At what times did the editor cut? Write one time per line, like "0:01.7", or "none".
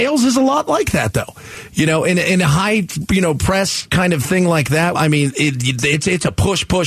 0:04.9